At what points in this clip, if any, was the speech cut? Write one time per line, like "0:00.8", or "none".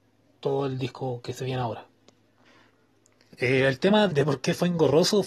0:04.1